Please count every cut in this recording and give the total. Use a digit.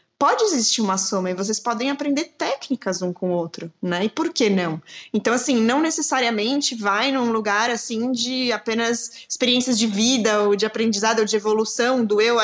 0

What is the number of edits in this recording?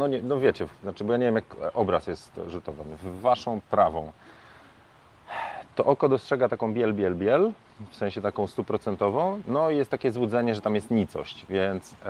0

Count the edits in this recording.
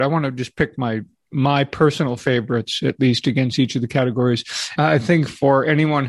1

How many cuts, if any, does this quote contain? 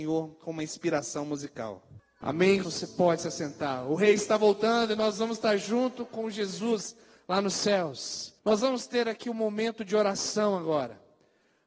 2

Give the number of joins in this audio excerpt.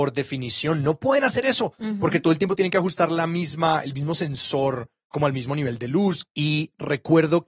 1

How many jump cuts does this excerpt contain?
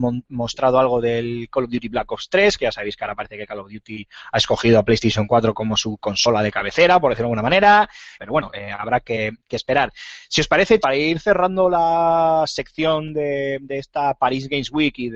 2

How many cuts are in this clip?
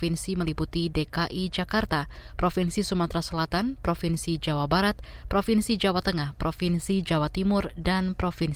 0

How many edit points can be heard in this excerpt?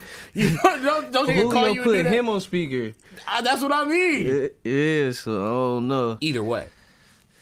2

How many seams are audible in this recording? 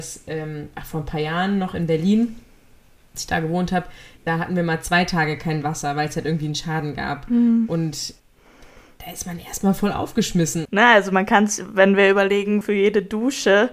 2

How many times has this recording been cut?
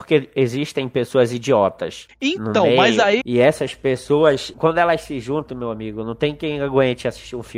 2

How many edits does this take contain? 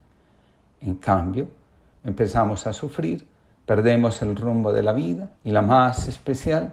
3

